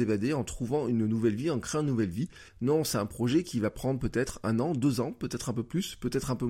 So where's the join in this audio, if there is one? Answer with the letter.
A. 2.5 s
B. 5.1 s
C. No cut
A